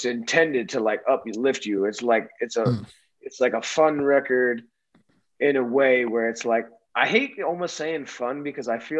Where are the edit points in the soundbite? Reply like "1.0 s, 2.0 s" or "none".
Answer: none